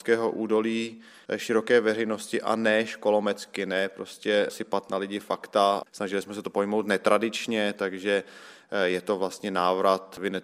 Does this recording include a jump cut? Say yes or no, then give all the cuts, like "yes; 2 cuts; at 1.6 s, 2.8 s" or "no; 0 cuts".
yes; 1 cut; at 5.9 s